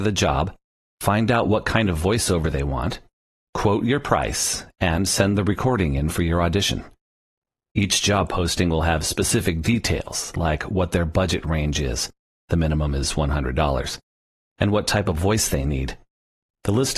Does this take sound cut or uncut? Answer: uncut